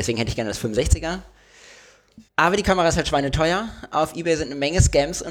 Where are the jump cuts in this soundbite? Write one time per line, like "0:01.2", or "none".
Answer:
0:02.3